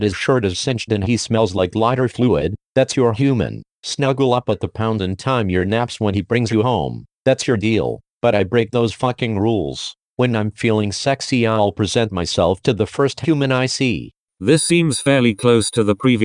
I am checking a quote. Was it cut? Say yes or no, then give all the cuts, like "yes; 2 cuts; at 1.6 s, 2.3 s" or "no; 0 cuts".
no; 0 cuts